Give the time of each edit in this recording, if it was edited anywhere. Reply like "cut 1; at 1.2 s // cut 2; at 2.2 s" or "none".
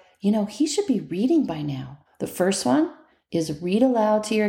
cut 1; at 2.1 s